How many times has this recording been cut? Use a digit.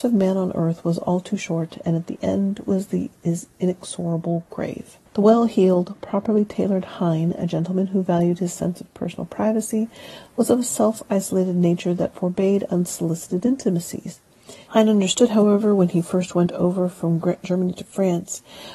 2